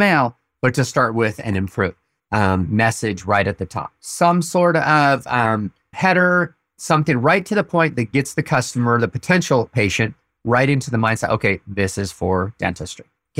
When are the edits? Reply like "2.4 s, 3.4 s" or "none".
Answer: 2.2 s